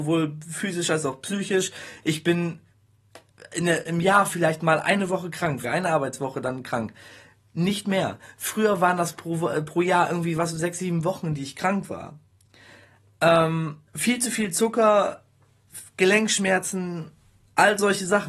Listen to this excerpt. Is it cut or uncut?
cut